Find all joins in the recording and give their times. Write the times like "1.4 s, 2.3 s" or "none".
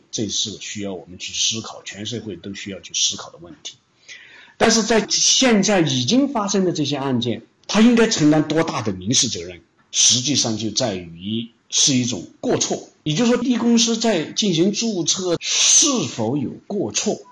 13.4 s, 15.4 s